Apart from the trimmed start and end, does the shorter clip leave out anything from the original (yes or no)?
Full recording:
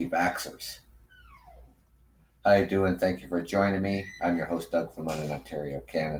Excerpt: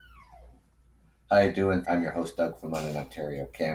yes